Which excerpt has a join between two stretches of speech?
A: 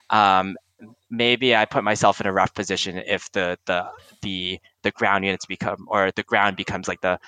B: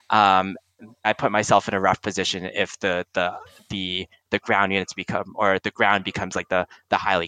B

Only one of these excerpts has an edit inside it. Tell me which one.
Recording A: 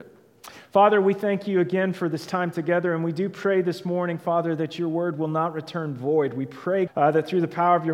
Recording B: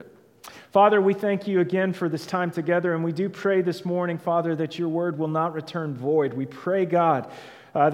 A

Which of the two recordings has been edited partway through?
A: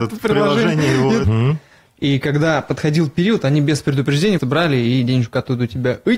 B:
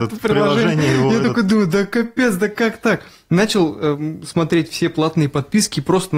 A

